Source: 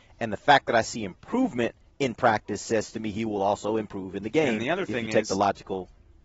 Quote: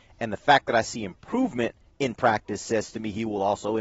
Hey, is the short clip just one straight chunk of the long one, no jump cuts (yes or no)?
yes